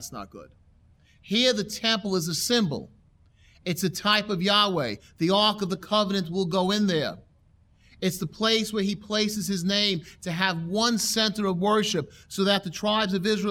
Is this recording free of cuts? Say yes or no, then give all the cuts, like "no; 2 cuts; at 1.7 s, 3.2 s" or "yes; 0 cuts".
yes; 0 cuts